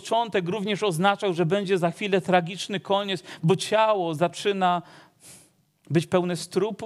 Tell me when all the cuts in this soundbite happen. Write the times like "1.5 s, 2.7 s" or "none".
none